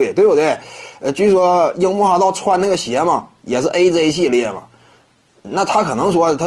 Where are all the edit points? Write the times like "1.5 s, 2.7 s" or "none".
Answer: none